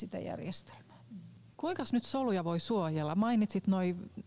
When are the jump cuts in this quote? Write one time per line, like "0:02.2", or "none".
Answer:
0:01.5